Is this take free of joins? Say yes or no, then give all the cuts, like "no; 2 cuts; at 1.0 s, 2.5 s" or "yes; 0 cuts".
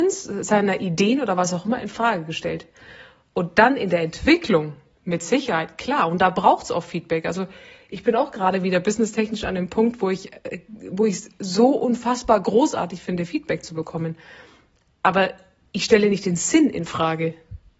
yes; 0 cuts